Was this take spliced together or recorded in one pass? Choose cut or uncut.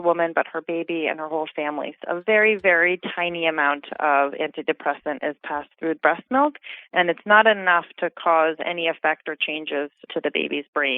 cut